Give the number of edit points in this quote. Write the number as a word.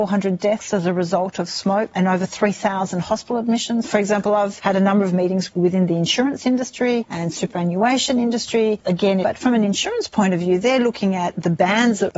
two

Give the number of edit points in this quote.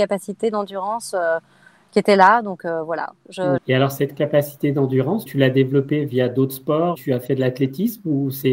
three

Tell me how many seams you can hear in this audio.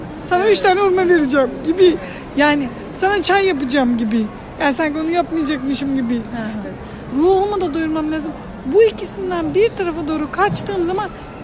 one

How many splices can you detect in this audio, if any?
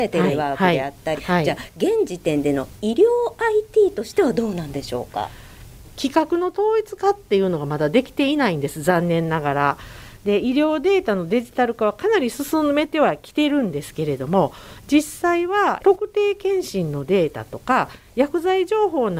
two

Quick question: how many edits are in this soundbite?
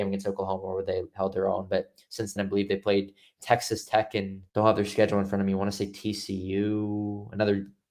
two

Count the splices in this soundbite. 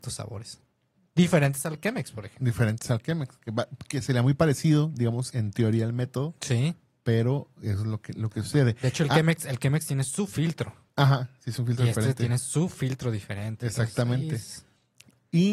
one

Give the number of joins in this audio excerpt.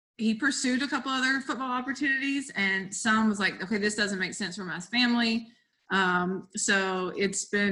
one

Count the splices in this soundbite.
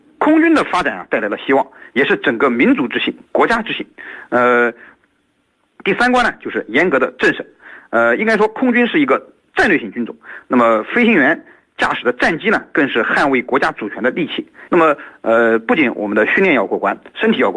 one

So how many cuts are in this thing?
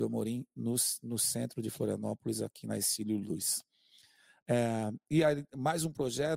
zero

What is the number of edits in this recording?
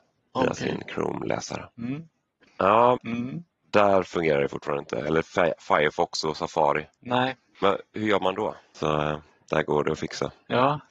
two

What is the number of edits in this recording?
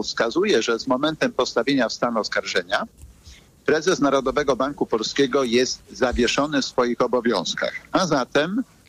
zero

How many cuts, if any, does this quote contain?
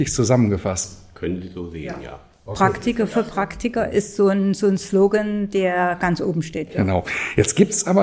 zero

